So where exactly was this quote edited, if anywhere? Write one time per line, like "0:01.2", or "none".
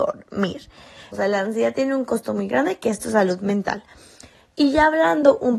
0:01.1